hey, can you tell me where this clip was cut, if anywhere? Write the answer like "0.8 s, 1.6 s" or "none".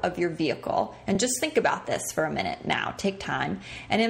none

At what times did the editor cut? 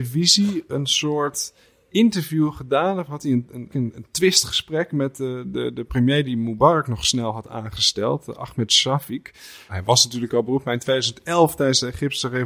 3.7 s, 9.7 s

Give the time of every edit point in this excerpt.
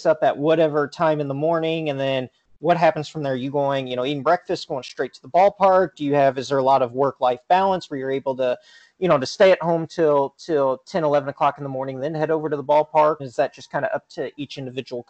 13.2 s

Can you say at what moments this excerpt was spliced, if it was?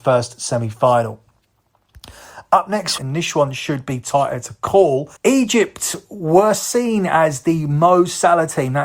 3.0 s, 5.2 s

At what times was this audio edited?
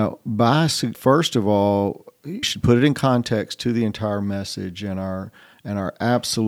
0.9 s, 2.4 s

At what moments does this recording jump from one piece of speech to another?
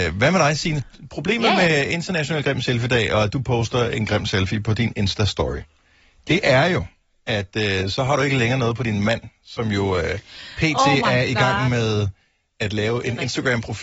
none

